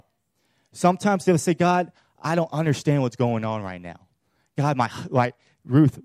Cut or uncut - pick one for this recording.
uncut